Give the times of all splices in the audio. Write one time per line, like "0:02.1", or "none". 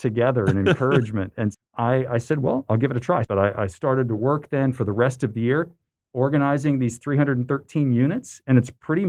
0:01.5
0:03.2